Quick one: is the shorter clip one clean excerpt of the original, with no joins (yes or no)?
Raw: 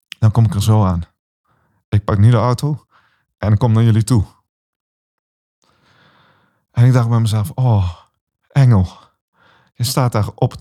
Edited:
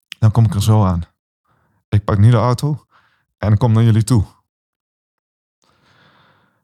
yes